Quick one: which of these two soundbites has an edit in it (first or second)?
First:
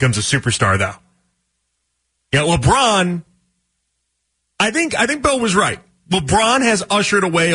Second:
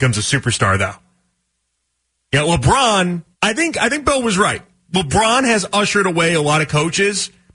second